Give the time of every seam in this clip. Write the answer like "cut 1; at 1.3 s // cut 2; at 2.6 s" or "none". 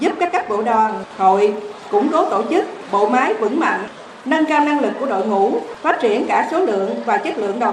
none